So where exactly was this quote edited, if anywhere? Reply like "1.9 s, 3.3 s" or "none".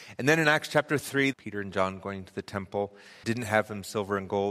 1.3 s, 3.2 s